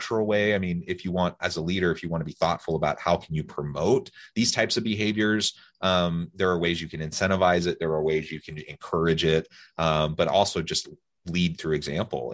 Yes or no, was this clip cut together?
no